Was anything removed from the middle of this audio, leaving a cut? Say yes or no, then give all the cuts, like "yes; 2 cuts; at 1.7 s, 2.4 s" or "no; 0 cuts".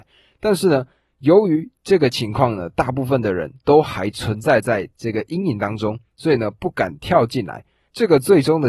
no; 0 cuts